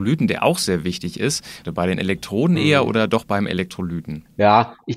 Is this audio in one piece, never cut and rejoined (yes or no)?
no